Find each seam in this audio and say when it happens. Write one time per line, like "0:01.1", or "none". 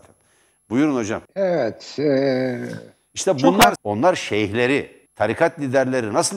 0:01.3
0:03.8
0:05.1

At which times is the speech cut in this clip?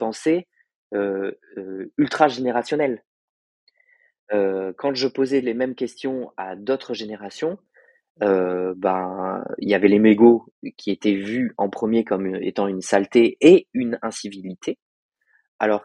none

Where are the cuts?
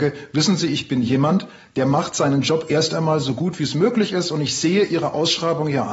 none

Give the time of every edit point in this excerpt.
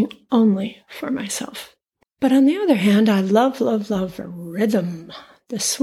0:02.0

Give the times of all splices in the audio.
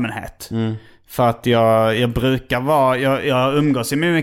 none

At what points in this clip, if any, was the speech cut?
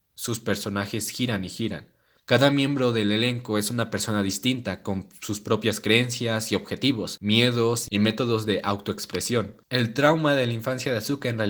0:02.2
0:09.6

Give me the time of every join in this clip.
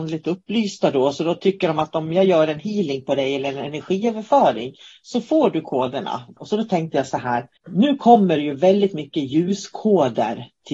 0:06.4
0:07.6

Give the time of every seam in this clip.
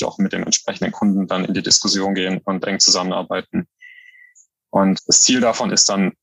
0:05.0

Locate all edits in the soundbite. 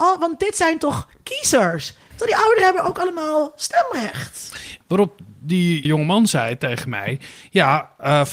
0:02.1
0:04.8
0:05.9

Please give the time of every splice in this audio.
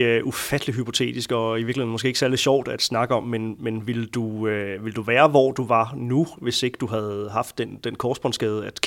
none

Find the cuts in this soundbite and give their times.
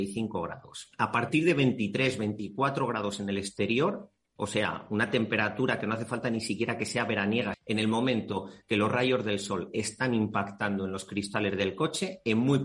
0:07.5

